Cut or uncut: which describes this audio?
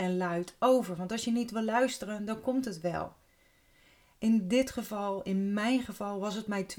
uncut